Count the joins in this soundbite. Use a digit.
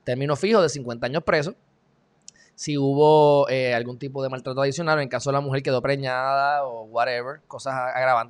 0